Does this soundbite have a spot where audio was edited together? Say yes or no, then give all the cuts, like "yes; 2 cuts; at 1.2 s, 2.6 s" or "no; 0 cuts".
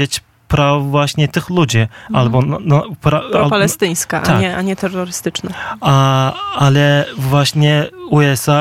no; 0 cuts